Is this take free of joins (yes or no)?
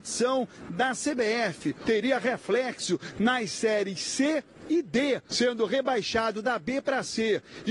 no